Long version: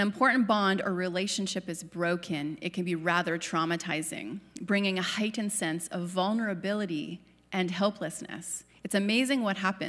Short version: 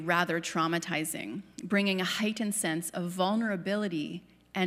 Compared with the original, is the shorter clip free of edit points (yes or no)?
yes